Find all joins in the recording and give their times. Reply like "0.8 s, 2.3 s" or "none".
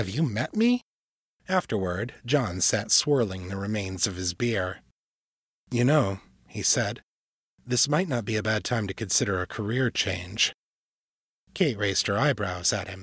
1.3 s